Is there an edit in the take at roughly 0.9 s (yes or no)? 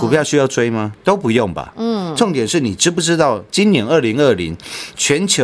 yes